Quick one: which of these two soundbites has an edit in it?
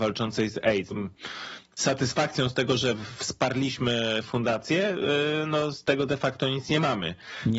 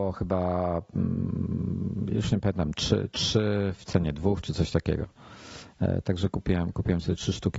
first; 1 cut; at 0.9 s

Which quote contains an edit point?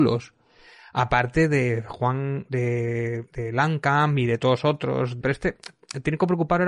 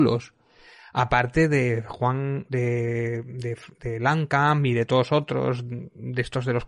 first; 2 cuts; at 3.2 s, 5.2 s

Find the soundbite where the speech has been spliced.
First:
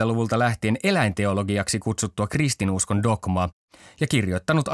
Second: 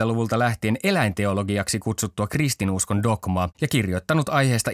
second; 1 cut; at 3.5 s

